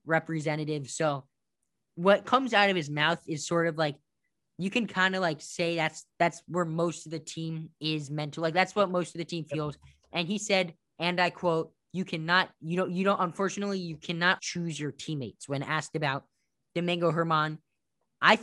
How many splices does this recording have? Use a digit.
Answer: 1